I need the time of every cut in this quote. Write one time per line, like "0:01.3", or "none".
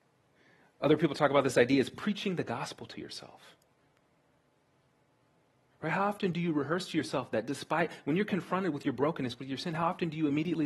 none